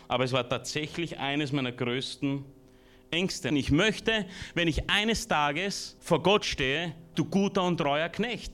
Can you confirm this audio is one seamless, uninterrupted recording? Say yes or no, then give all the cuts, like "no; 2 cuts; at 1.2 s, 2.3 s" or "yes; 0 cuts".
no; 3 cuts; at 3.5 s, 6.0 s, 7.1 s